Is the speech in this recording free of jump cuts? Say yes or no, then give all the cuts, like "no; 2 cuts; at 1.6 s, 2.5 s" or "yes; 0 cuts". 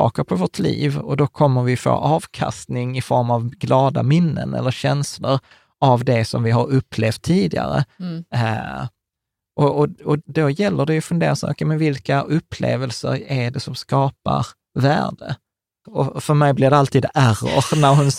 no; 2 cuts; at 10.2 s, 15.8 s